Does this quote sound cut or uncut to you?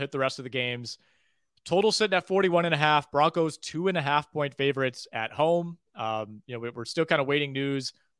uncut